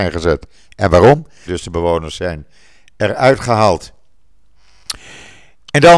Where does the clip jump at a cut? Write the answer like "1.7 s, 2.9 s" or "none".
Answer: 1.5 s